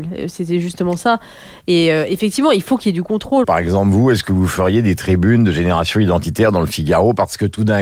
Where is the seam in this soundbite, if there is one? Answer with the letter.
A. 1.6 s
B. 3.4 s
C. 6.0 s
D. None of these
B